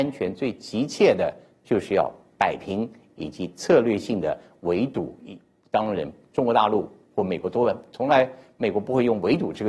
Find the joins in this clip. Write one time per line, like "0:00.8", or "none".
none